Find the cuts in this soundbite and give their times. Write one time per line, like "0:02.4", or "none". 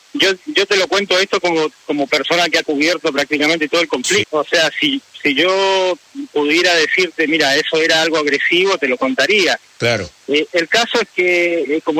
0:04.2
0:10.5